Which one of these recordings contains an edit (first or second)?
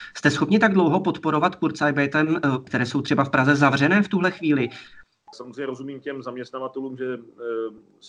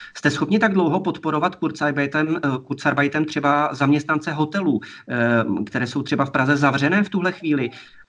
first